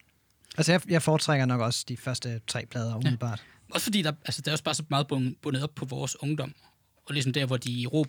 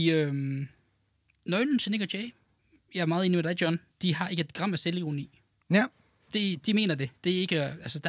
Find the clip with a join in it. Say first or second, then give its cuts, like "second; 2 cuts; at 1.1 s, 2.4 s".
second; 1 cut; at 3.9 s